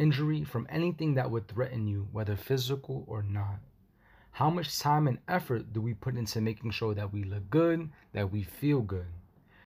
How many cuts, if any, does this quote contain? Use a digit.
0